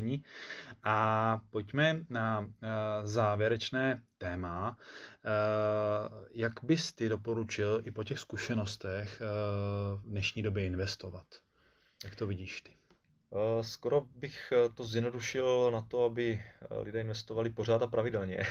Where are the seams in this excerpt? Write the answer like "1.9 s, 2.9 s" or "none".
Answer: none